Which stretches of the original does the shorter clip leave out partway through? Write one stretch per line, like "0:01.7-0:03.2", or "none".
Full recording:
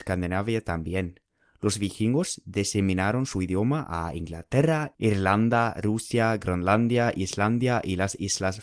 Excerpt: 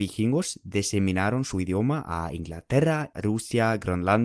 0:05.0-0:05.7

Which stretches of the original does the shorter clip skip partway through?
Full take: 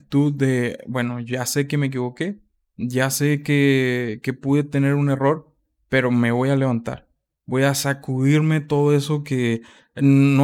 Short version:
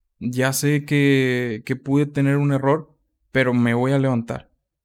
none

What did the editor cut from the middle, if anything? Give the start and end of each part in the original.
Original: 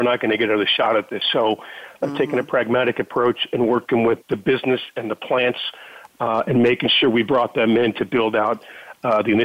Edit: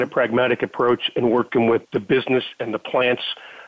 none

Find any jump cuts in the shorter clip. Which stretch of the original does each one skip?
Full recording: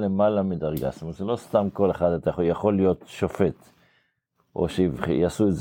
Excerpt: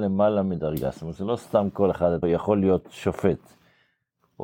0:02.2-0:02.4

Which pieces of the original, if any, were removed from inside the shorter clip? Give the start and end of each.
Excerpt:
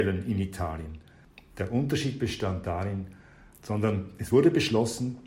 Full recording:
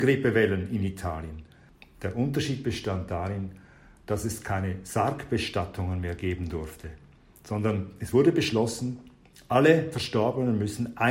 0:04.0-0:07.3

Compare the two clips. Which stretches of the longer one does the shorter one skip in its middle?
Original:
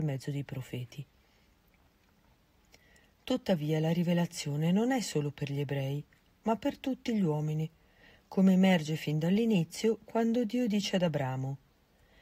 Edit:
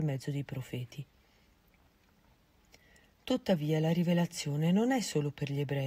none

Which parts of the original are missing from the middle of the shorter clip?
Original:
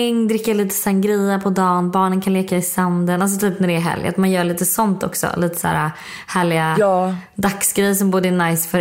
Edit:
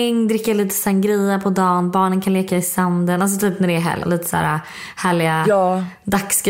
0:04.0-0:05.3

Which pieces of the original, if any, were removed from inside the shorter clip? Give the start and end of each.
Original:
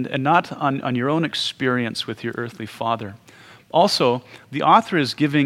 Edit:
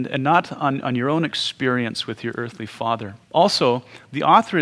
0:03.2-0:03.6

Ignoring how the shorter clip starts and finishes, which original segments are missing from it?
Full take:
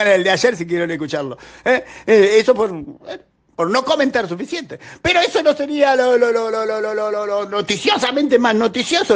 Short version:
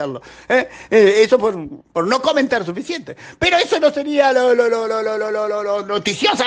0:03.0-0:03.4

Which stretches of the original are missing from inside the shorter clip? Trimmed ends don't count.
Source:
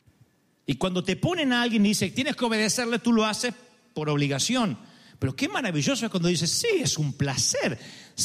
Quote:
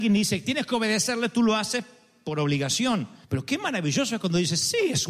0:04.9-0:05.1

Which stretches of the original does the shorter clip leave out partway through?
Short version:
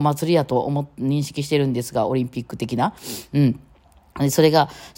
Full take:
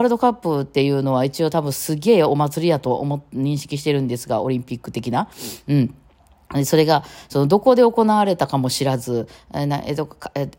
none

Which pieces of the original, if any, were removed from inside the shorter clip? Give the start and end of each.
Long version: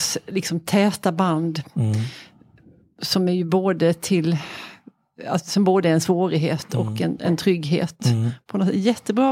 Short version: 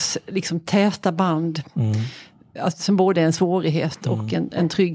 0:02.6-0:05.2

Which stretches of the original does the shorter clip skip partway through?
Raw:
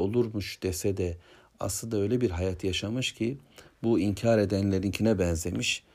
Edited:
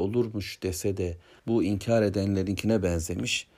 0:01.4-0:03.8

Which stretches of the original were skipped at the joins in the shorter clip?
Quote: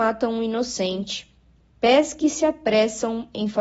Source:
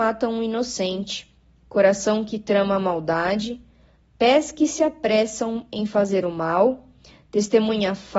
0:01.6-0:04.0

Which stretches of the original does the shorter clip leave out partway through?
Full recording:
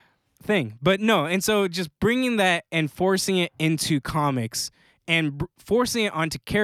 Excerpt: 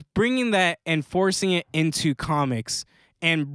none

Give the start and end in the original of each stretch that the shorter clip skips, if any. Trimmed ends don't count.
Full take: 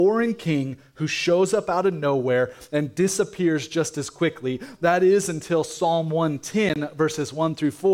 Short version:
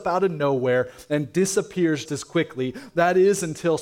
0:03.7-0:03.9

